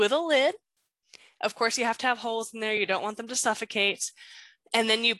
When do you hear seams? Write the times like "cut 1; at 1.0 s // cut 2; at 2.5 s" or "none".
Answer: none